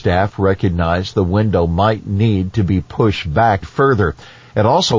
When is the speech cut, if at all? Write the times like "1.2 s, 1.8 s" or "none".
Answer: 3.6 s